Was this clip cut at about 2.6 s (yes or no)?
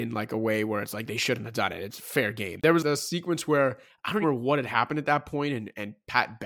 yes